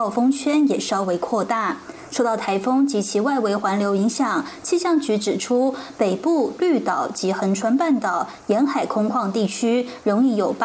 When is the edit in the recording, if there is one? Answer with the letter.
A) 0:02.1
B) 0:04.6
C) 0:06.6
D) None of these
C